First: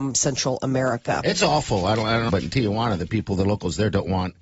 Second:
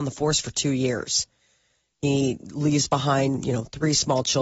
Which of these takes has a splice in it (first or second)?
first